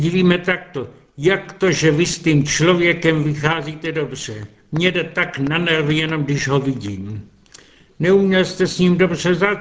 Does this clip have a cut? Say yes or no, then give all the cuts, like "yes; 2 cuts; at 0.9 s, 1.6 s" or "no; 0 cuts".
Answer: no; 0 cuts